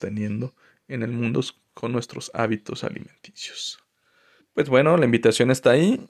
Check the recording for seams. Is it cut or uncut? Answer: cut